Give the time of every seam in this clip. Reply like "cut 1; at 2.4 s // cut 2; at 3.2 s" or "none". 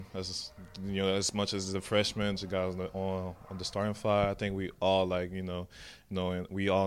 cut 1; at 2.4 s